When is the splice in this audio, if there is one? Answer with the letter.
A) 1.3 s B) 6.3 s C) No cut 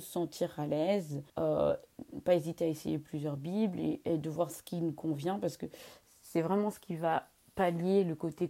A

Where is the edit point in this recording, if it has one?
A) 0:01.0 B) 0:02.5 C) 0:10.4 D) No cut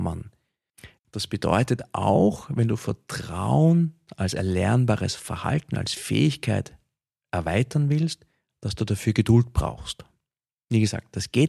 A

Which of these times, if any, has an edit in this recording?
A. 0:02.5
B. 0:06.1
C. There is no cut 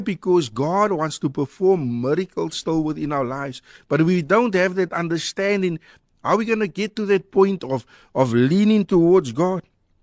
B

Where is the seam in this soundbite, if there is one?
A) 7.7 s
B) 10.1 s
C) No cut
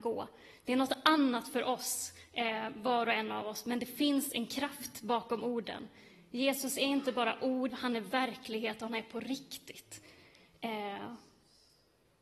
A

